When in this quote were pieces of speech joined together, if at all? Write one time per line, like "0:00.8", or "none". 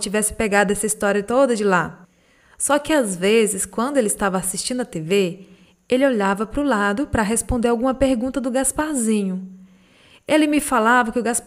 none

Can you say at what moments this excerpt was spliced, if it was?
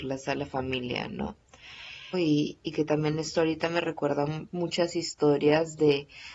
0:02.1

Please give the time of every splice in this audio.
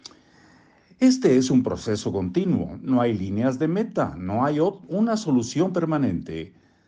none

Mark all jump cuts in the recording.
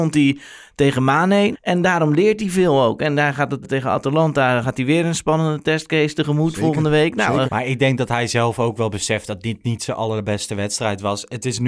0:01.5
0:03.6
0:07.5

